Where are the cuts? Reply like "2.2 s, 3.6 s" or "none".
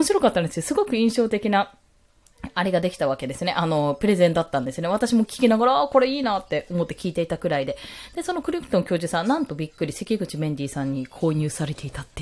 none